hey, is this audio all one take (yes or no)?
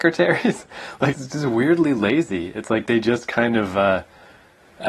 no